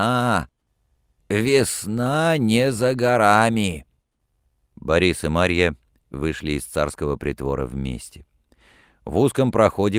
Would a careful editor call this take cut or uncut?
uncut